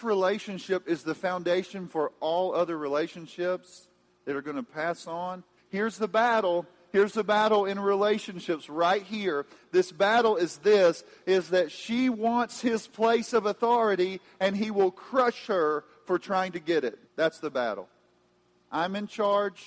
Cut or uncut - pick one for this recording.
cut